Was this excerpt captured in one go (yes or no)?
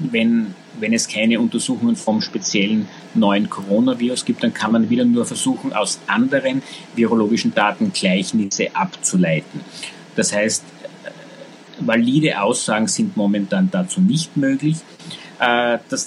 yes